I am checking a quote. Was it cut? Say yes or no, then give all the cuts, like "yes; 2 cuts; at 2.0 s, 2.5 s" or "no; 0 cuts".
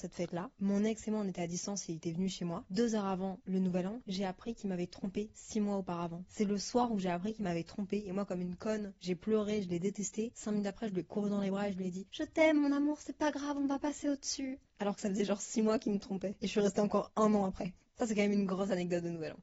no; 0 cuts